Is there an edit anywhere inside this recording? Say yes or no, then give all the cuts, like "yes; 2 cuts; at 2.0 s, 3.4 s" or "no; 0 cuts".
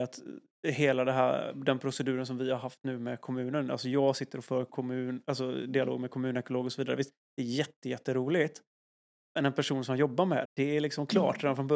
yes; 1 cut; at 10.5 s